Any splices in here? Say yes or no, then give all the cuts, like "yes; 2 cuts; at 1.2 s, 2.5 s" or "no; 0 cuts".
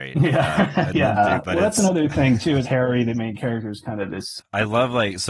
yes; 3 cuts; at 1.2 s, 2.6 s, 4.4 s